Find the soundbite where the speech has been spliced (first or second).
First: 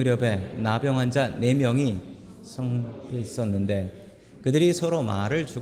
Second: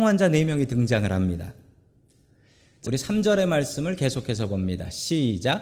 second